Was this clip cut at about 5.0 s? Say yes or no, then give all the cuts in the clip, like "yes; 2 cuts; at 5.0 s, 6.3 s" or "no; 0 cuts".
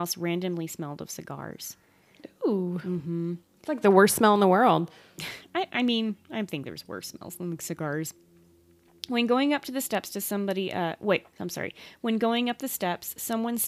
no; 0 cuts